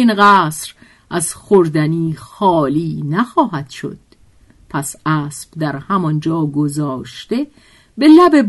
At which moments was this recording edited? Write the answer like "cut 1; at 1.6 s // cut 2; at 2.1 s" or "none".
none